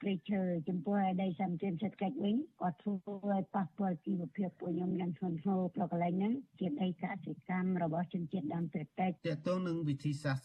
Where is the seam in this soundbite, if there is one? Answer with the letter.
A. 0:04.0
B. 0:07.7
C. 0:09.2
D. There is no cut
C